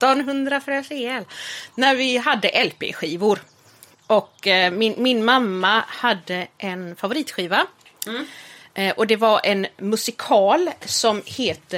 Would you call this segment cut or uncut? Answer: uncut